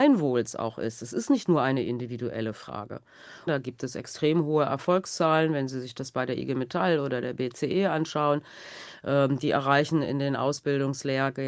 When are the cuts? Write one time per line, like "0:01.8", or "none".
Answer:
0:03.5